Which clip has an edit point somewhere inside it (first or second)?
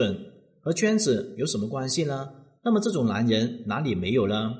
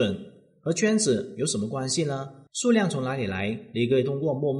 second